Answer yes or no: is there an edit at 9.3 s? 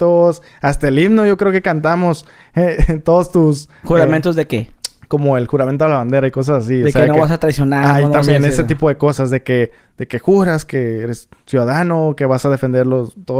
no